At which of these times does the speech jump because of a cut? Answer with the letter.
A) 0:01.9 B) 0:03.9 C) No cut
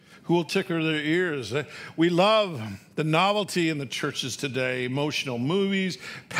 C